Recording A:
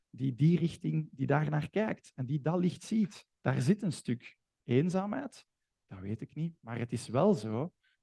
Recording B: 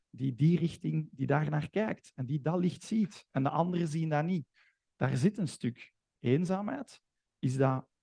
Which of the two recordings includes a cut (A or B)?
A